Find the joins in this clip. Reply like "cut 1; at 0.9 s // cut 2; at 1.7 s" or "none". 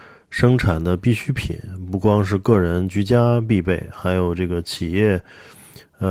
none